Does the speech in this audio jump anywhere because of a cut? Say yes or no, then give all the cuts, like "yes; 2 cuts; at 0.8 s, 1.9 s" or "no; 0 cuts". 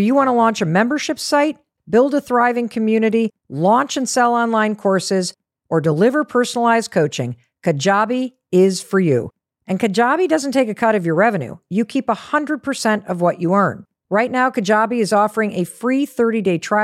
yes; 1 cut; at 1.8 s